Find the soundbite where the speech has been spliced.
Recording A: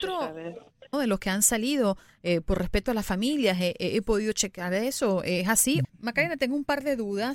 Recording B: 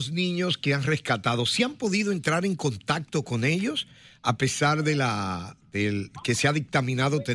A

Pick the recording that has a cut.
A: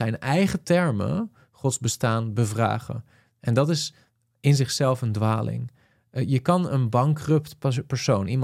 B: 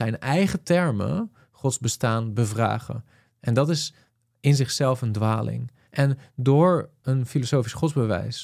B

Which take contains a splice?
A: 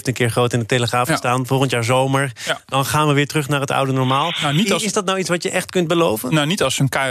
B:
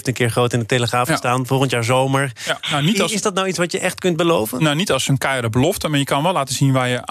B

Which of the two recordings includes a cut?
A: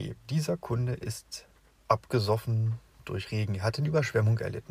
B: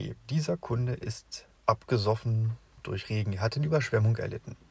B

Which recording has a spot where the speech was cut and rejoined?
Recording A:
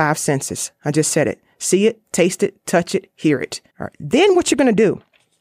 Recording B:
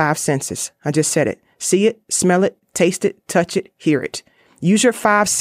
A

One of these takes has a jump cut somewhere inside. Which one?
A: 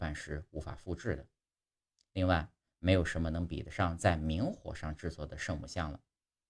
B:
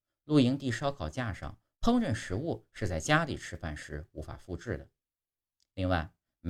B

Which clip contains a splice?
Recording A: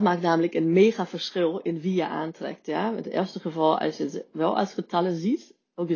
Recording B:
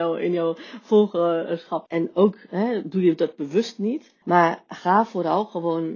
B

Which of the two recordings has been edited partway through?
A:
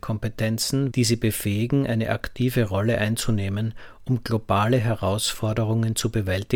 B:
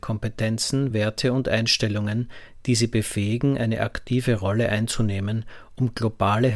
A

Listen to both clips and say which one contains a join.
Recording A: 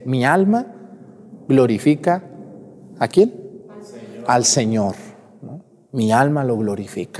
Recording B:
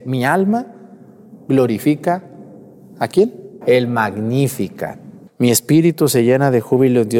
B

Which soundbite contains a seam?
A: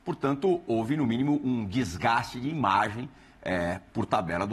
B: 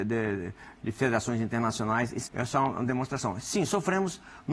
B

